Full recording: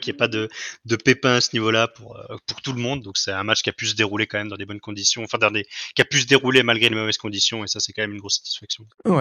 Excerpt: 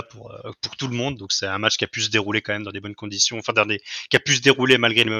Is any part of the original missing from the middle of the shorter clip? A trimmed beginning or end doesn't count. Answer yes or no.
no